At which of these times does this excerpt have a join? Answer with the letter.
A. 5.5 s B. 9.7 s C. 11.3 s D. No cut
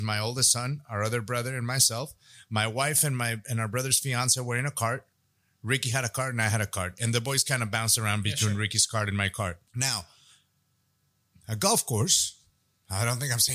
B